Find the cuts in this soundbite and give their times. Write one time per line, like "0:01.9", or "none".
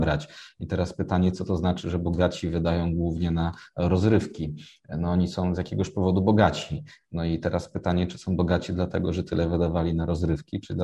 none